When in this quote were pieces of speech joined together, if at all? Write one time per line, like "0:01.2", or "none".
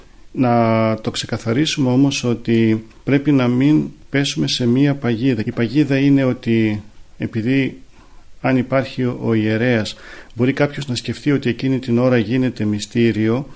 0:05.4